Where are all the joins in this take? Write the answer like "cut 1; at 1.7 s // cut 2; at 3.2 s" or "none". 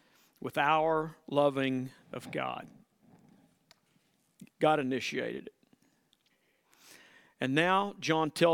cut 1; at 4.5 s